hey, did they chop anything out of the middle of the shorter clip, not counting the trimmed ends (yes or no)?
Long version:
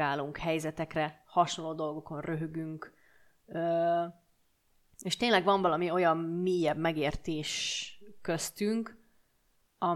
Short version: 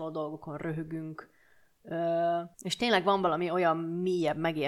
yes